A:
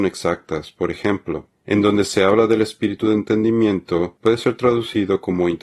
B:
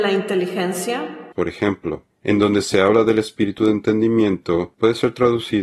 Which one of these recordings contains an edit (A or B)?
B